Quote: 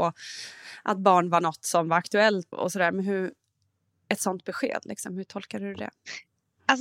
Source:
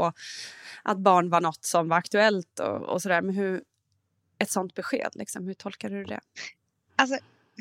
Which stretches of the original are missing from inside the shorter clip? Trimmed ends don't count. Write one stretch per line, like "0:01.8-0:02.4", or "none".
0:02.5-0:02.8